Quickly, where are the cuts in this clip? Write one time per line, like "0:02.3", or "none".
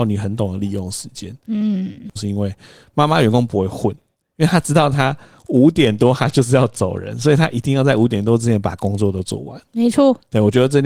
0:02.2